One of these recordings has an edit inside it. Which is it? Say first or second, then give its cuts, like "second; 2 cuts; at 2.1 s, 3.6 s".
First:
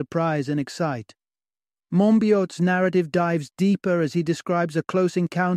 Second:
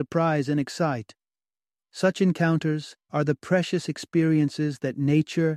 second; 2 cuts; at 1.8 s, 3.0 s